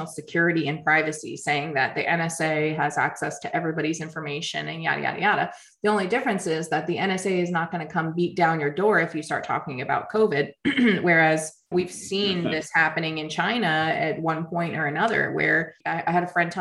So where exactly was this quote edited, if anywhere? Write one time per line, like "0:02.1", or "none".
0:11.7